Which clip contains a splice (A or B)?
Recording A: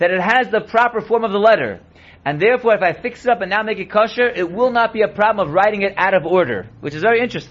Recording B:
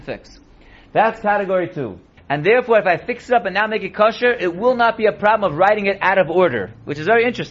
B